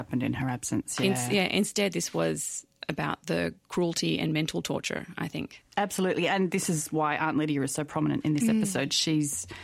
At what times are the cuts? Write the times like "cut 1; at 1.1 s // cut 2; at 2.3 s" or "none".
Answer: none

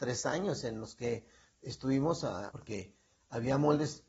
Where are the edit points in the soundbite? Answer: cut 1; at 2.5 s

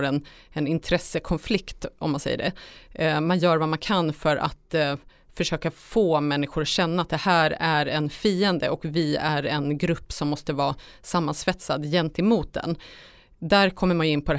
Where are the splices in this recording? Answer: none

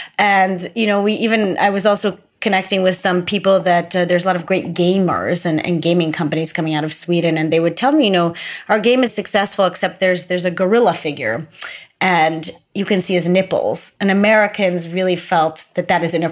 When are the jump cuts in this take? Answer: cut 1; at 9.1 s

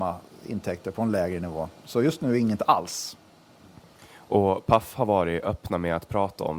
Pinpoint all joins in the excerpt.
none

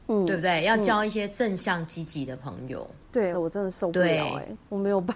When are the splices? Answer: cut 1; at 3.3 s

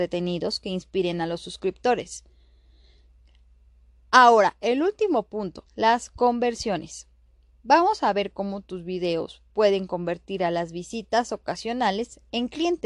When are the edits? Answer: cut 1; at 5.7 s

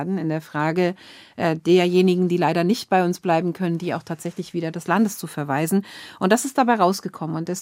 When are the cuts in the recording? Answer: none

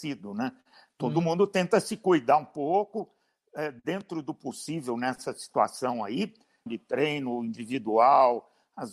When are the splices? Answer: cut 1; at 6.7 s

